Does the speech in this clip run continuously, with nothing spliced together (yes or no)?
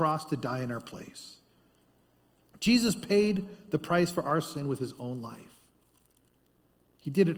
yes